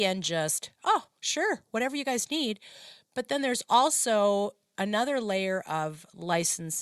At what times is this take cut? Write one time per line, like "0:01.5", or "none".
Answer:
none